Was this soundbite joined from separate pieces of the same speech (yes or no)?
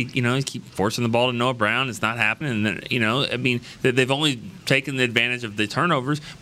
yes